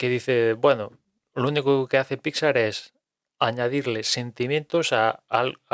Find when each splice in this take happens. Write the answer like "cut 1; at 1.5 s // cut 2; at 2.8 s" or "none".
none